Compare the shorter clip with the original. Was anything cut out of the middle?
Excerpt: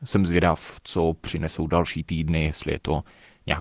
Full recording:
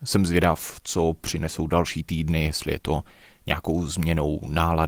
no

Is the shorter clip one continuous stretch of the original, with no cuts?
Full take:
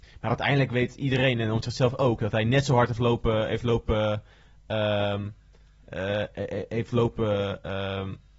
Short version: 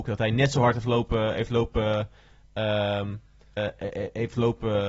no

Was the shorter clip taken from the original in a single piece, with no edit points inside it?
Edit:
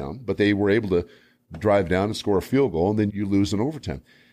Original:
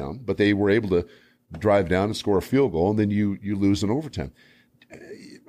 no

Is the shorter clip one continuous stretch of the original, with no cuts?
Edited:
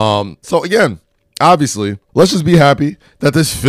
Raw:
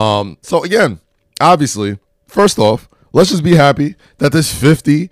no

